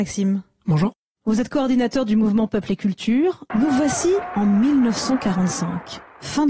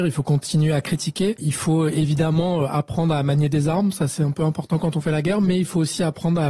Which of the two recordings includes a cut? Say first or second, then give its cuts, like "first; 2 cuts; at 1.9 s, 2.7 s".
first; 1 cut; at 3.5 s